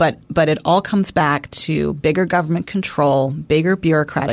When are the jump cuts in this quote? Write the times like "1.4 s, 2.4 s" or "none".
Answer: none